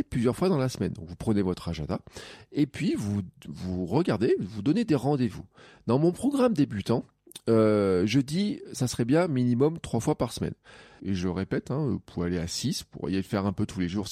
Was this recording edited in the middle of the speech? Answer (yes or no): yes